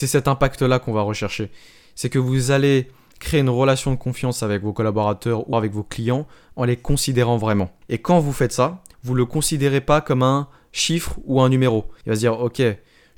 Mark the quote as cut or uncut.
cut